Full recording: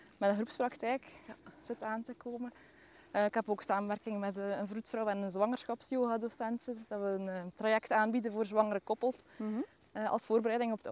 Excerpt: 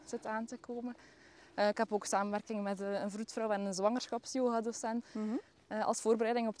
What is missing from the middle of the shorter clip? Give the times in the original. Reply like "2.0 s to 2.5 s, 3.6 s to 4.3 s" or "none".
6.6 s to 9.3 s